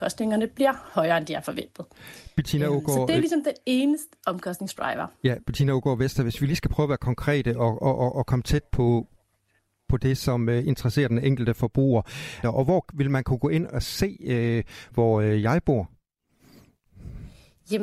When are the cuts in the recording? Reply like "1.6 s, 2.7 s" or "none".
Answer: 12.4 s, 14.9 s